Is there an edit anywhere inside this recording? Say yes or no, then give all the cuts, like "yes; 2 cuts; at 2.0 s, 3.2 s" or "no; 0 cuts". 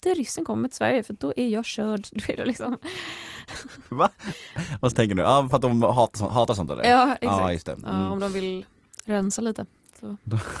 no; 0 cuts